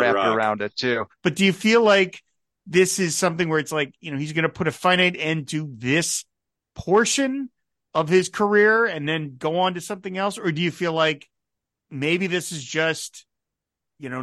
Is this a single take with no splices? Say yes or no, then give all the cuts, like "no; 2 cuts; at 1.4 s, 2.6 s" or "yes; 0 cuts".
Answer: no; 1 cut; at 1.1 s